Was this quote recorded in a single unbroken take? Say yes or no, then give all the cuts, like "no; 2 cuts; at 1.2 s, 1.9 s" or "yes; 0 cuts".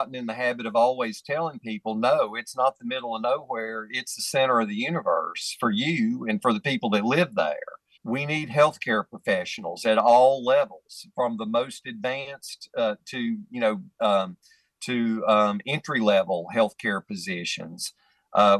no; 1 cut; at 7.9 s